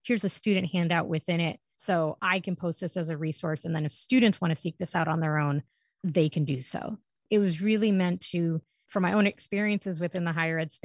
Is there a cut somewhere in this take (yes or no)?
no